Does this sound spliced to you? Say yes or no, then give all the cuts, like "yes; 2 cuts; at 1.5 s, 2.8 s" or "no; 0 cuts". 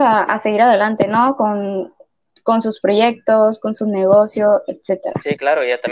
no; 0 cuts